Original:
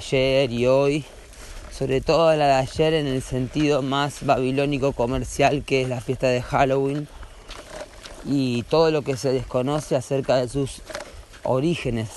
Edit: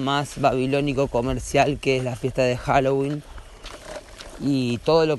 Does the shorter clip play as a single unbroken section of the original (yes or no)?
yes